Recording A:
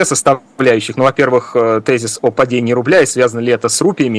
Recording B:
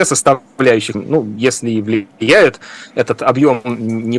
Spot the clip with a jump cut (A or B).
B